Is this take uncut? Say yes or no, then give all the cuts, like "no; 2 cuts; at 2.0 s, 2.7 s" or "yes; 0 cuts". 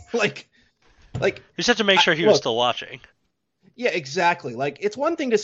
yes; 0 cuts